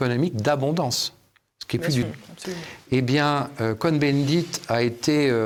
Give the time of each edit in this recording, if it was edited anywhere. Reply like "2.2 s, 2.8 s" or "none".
2.0 s